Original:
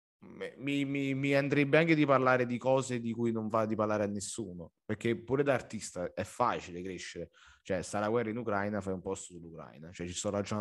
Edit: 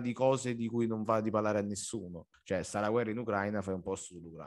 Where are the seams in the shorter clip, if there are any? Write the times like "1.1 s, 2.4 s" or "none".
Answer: 2.3 s